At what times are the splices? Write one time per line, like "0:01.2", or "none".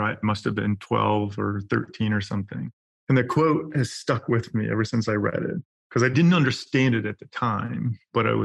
none